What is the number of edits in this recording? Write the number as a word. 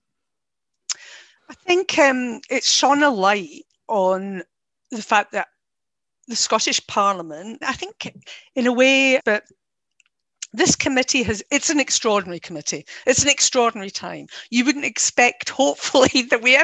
three